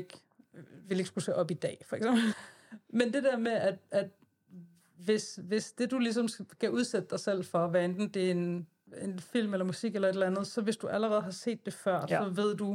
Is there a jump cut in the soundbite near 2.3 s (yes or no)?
yes